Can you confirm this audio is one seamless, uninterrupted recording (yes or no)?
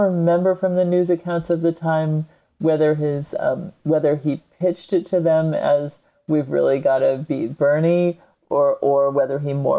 yes